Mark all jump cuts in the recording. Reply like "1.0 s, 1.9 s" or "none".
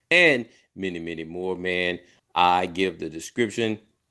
2.2 s